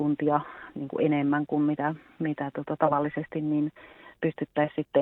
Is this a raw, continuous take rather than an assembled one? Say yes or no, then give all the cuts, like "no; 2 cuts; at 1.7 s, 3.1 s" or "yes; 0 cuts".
yes; 0 cuts